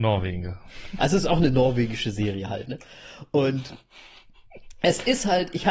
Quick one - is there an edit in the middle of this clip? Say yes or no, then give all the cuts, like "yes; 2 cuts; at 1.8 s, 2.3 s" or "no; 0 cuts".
no; 0 cuts